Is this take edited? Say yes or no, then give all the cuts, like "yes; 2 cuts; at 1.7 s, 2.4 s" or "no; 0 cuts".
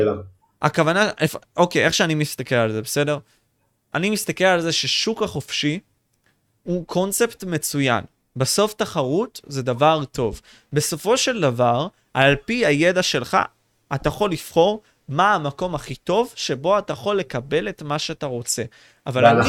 no; 0 cuts